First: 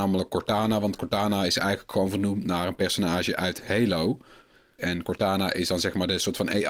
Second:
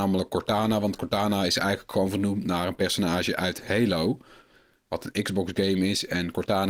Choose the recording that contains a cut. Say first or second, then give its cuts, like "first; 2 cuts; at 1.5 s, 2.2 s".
first; 1 cut; at 4.8 s